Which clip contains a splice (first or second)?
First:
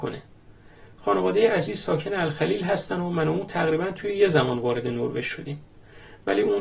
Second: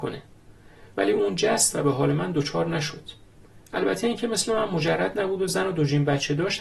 second